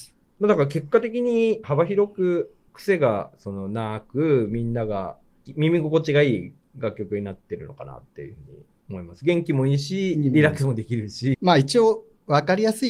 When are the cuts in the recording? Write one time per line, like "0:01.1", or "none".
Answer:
0:01.6
0:11.3